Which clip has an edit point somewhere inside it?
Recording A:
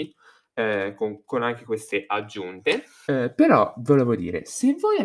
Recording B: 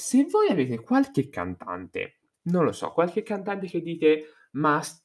A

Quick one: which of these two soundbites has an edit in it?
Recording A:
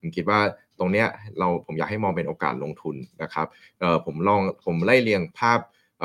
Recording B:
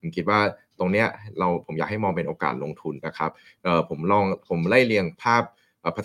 B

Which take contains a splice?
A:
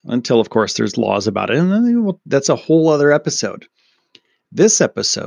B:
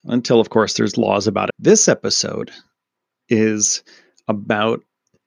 B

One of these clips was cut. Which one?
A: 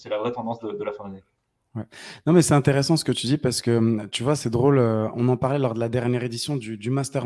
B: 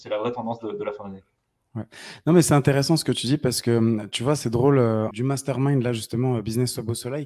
B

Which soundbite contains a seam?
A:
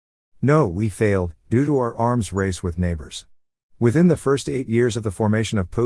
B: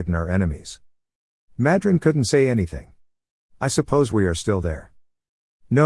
B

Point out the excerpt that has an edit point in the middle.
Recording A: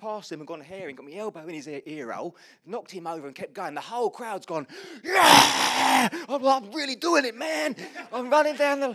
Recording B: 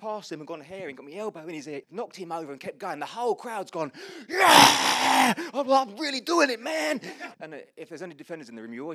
B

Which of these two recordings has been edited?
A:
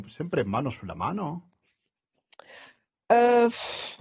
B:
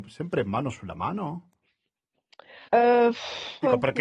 B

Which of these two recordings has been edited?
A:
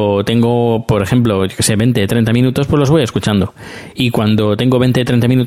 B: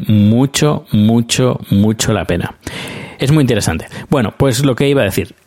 B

